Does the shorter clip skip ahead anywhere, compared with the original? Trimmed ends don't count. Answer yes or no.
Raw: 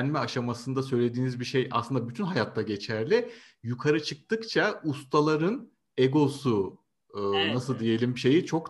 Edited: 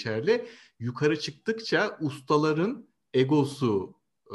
no